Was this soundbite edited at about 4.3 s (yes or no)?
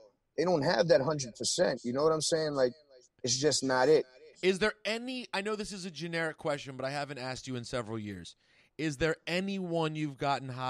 yes